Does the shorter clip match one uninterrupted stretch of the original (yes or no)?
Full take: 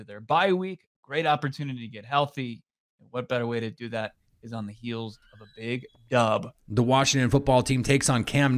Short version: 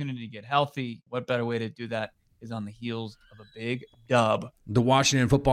no